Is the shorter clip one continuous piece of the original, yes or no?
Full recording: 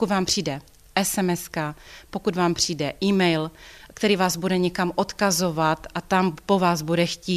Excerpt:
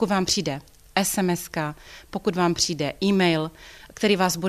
yes